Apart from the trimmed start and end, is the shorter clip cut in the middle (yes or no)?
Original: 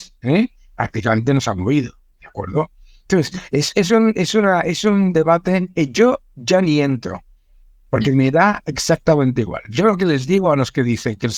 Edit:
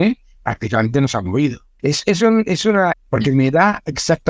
yes